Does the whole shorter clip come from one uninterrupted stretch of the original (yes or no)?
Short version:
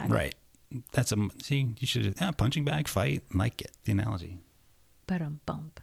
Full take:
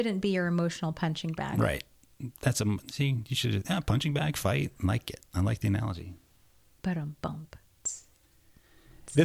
no